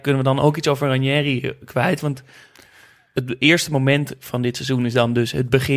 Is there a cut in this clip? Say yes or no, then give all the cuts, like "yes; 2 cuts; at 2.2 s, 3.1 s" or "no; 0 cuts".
no; 0 cuts